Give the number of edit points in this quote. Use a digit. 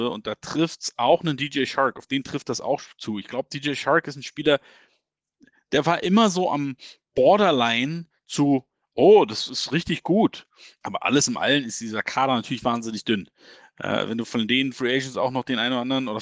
1